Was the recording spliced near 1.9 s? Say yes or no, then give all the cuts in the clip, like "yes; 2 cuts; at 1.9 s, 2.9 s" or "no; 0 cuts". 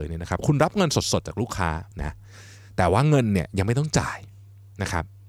yes; 1 cut; at 1.9 s